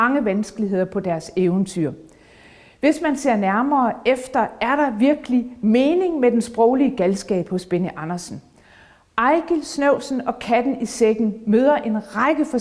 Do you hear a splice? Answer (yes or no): no